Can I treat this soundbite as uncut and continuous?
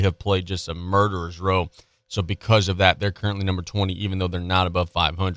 yes; 0 cuts

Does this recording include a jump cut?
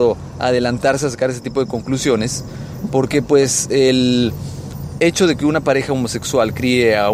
no; 0 cuts

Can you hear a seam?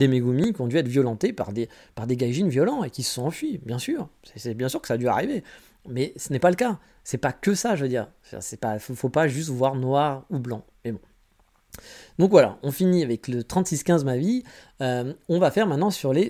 no; 0 cuts

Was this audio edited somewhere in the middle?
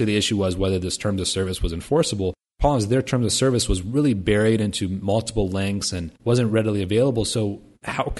no; 0 cuts

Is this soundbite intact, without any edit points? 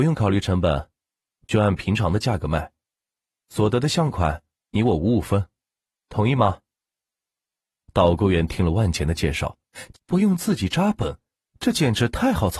no; 2 cuts; at 9.9 s, 11.5 s

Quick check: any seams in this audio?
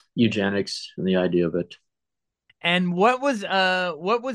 yes; 1 cut; at 2.5 s

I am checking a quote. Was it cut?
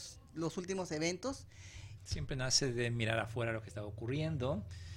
yes; 1 cut; at 2.0 s

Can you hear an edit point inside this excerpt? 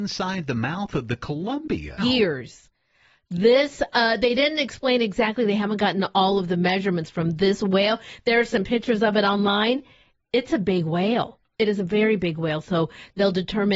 yes; 1 cut; at 2.0 s

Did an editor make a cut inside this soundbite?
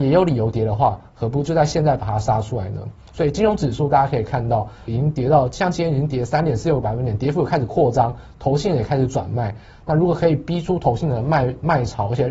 yes; 1 cut; at 4.9 s

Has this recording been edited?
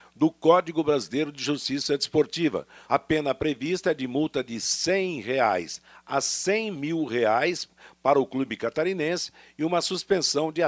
yes; 1 cut; at 2.9 s

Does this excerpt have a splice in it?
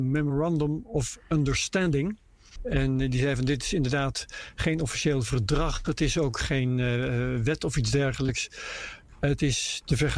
yes; 1 cut; at 2.6 s

